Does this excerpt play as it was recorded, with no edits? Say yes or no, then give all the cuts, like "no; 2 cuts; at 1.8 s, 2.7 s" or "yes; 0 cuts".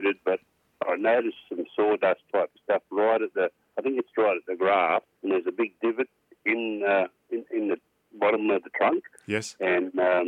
no; 1 cut; at 5.1 s